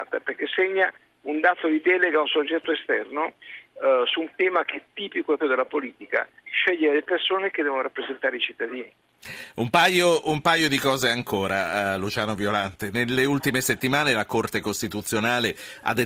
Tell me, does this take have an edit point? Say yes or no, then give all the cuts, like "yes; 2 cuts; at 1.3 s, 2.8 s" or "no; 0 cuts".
yes; 1 cut; at 5.4 s